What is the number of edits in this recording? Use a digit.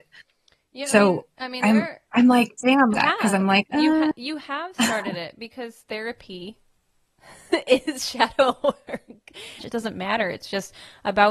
2